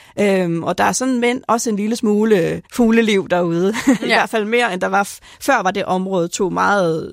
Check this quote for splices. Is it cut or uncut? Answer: cut